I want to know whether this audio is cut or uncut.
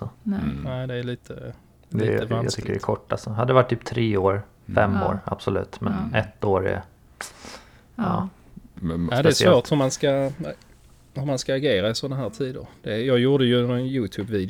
uncut